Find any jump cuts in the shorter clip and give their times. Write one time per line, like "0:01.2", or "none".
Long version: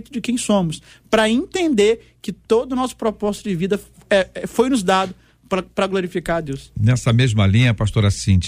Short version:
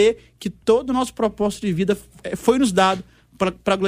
0:02.2